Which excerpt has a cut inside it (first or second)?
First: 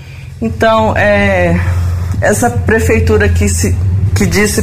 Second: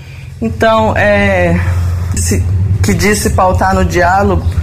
second